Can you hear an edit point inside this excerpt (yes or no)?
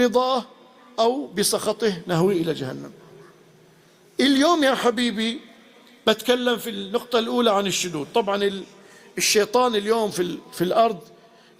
no